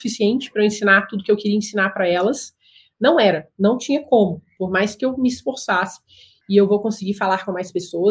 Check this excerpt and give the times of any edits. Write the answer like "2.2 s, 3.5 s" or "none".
6.4 s